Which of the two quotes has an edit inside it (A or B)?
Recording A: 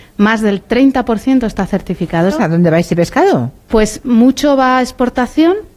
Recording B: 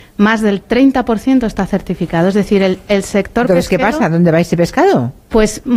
A